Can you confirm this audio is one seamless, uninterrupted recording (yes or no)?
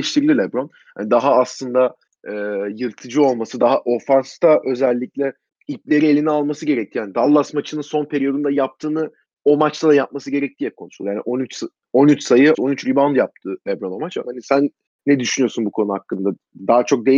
no